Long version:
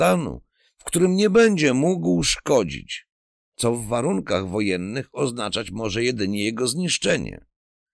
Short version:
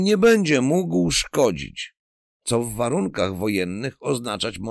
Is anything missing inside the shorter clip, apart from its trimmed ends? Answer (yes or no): no